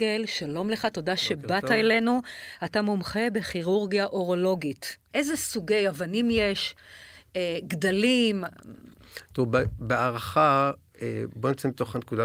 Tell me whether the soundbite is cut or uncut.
uncut